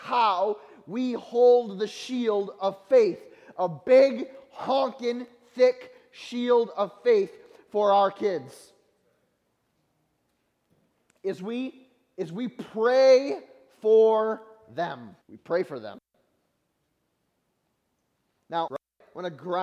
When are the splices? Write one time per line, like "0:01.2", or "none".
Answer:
0:15.2
0:18.7